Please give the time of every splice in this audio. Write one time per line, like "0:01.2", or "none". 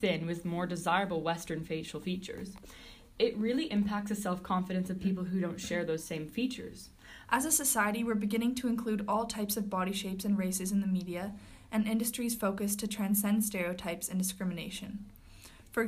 0:07.2